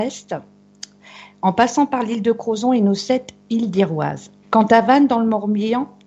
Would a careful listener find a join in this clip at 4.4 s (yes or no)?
yes